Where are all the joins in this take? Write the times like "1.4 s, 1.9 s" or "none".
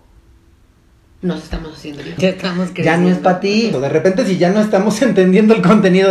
2.2 s, 3.7 s